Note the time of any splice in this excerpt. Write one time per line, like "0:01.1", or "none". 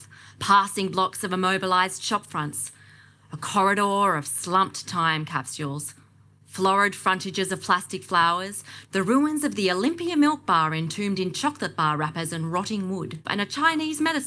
0:08.8
0:13.2